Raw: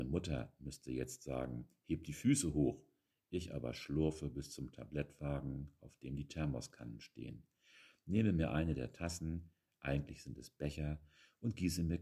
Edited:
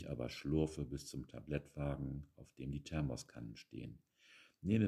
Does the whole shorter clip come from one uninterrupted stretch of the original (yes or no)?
yes